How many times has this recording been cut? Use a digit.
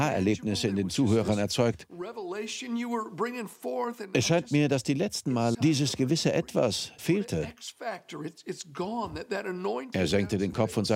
3